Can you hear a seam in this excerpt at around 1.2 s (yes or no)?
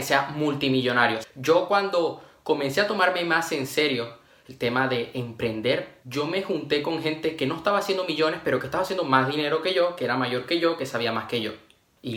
yes